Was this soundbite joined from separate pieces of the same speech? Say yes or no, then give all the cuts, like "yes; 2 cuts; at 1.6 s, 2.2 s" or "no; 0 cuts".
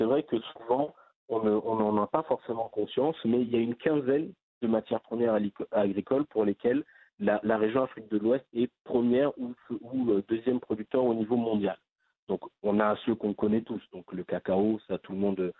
no; 0 cuts